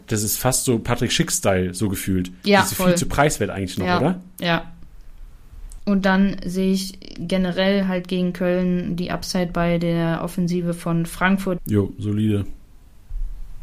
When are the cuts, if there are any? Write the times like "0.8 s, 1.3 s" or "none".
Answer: 5.8 s, 11.6 s